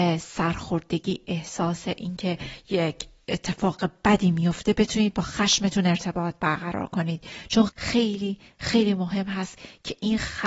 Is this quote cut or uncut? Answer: cut